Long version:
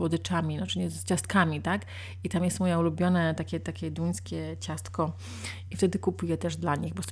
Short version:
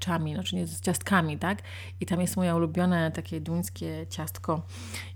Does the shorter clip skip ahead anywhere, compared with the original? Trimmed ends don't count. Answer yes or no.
yes